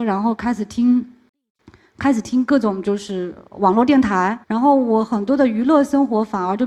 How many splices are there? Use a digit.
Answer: 1